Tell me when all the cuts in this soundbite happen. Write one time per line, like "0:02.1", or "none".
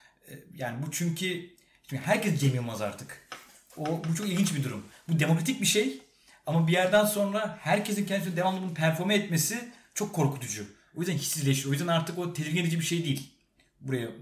none